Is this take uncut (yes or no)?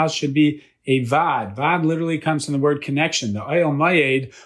yes